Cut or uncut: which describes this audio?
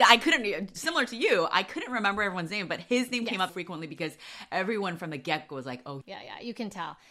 cut